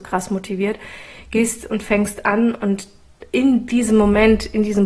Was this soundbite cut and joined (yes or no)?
no